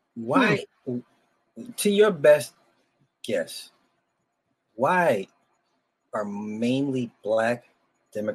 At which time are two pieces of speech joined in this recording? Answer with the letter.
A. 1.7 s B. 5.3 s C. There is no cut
C